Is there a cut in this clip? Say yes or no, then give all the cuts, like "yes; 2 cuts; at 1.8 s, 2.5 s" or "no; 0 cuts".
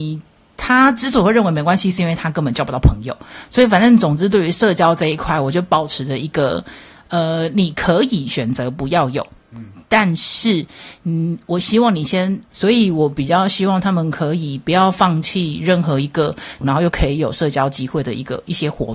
yes; 2 cuts; at 12.5 s, 16.6 s